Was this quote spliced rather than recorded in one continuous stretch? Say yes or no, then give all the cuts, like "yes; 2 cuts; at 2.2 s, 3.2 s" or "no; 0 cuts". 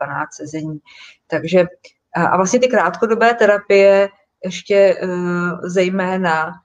no; 0 cuts